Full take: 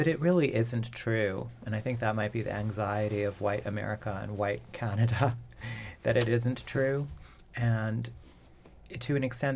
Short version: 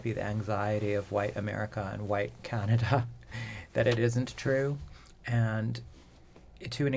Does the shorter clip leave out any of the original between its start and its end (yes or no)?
no